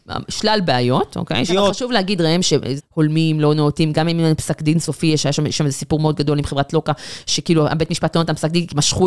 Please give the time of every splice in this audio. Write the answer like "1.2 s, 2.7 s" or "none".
1.5 s, 2.8 s